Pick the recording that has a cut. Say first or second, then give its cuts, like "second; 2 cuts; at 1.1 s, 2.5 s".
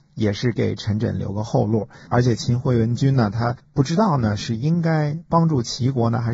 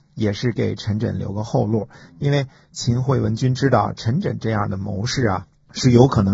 first; 1 cut; at 2.1 s